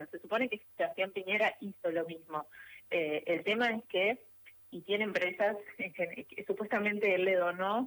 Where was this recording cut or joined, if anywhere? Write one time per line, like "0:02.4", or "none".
none

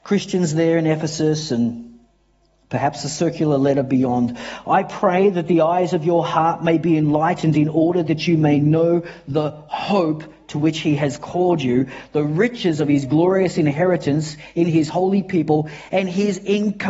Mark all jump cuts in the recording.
none

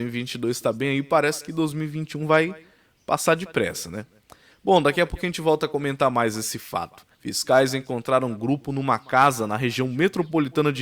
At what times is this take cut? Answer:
0:07.1

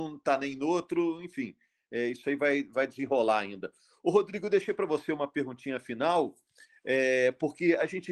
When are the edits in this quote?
none

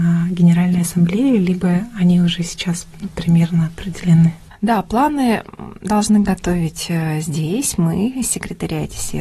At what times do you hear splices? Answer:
none

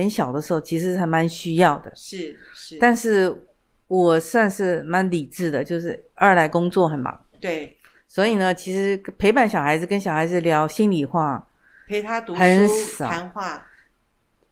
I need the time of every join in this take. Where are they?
none

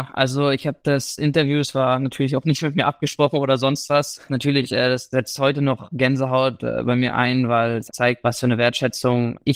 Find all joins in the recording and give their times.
0:04.3
0:07.9

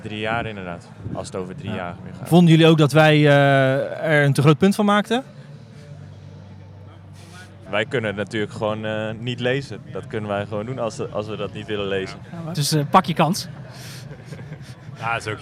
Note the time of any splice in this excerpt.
0:07.7
0:12.5

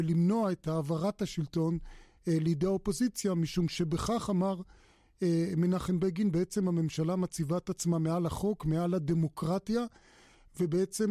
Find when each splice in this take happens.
none

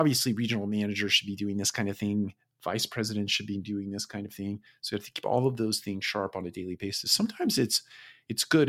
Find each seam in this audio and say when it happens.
0:04.7

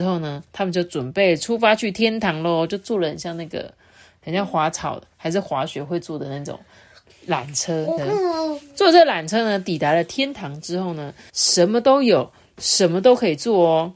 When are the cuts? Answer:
0:08.0
0:11.3

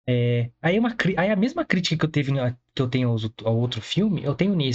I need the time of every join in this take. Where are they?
none

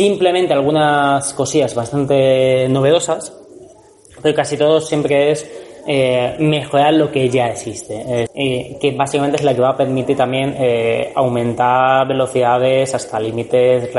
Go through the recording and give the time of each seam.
0:08.3

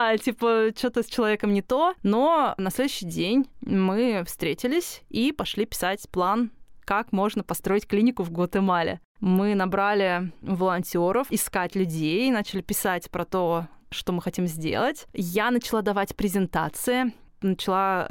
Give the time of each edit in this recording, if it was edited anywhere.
0:11.3

